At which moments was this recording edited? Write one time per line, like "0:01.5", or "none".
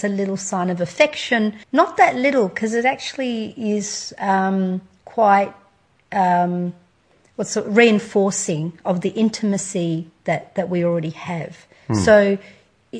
0:01.6